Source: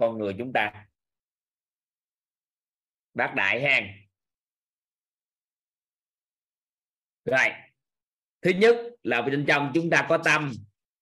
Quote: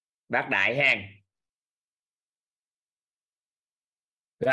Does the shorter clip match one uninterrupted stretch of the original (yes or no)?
yes